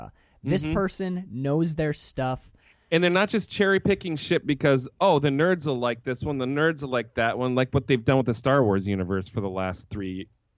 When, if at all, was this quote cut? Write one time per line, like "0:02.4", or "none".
none